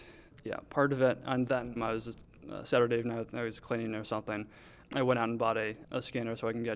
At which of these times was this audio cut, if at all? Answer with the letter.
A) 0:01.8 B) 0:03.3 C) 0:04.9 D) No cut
A